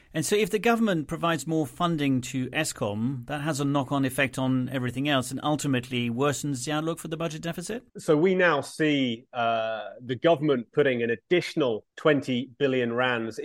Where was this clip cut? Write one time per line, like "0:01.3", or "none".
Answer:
0:07.9
0:11.9